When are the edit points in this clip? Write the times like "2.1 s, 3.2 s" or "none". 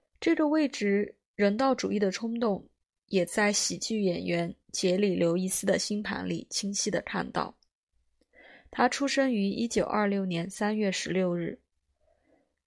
none